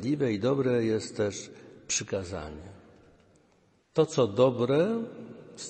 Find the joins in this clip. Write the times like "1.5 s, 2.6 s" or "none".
3.8 s